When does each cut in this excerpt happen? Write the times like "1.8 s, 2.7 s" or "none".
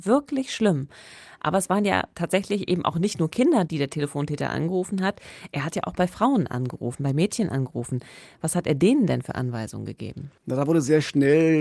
3.7 s, 10.4 s